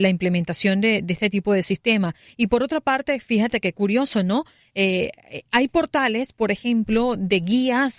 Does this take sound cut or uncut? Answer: uncut